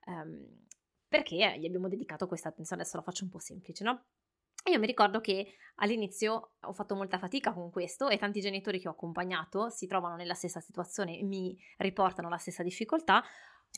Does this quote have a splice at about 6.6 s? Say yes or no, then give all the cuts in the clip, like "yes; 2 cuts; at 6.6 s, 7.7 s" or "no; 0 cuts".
yes; 1 cut; at 6.6 s